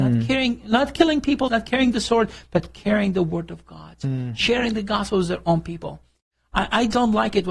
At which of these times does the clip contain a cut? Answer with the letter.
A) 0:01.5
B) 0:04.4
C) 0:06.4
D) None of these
A